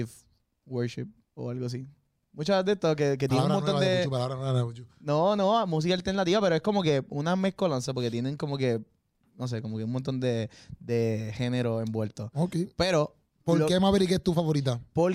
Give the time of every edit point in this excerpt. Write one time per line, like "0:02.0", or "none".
none